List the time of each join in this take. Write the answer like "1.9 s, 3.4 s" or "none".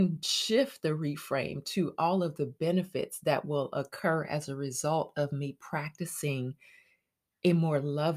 none